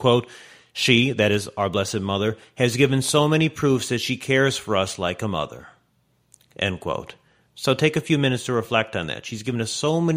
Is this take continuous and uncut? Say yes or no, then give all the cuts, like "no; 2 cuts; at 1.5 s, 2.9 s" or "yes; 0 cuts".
yes; 0 cuts